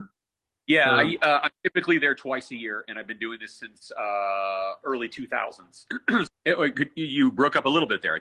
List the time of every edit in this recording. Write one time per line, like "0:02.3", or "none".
0:06.3